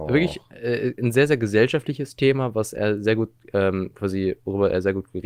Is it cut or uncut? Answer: uncut